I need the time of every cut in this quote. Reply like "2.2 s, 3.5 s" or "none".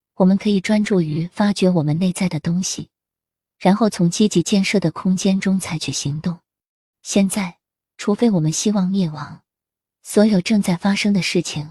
6.9 s, 9.9 s